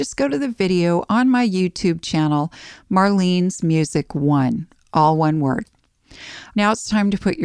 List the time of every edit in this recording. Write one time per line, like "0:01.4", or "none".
0:06.5